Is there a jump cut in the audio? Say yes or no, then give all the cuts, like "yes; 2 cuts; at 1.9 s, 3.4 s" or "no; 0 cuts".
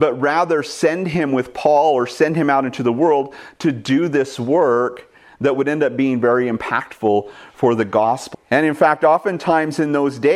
yes; 1 cut; at 8.3 s